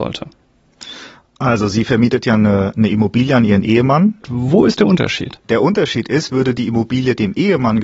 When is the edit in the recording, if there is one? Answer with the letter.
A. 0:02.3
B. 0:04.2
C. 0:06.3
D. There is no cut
B